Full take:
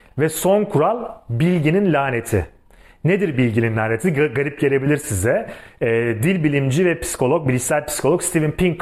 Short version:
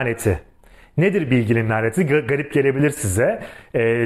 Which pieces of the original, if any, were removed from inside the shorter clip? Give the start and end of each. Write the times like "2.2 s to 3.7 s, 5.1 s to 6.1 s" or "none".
none